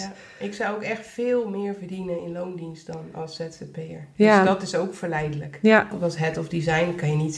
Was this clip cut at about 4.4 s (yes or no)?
no